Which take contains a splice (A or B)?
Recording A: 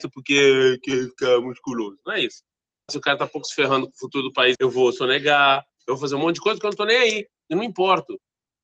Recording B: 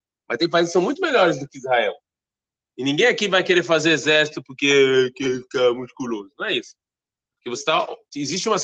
A